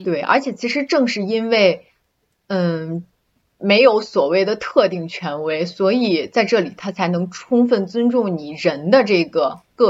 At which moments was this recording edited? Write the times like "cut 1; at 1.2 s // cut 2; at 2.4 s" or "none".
none